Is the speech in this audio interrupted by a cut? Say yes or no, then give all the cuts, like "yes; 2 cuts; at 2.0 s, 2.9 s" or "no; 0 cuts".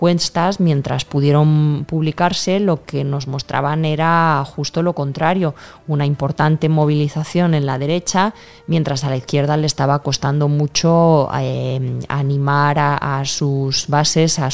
no; 0 cuts